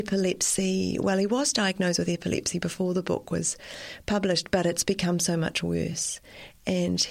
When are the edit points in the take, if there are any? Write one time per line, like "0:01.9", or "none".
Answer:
none